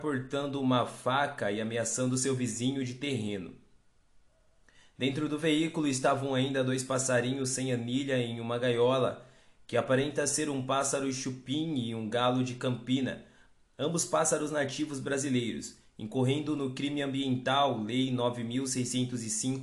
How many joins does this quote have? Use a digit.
0